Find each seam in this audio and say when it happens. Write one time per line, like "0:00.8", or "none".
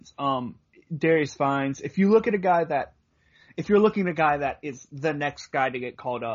none